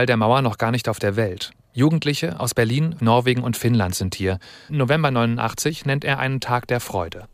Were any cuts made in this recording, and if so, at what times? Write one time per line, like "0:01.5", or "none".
0:03.0
0:04.7